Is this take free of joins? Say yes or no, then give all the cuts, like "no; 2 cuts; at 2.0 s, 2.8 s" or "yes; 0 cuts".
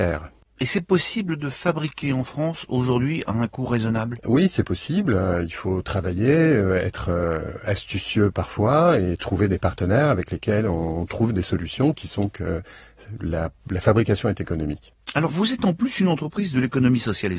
yes; 0 cuts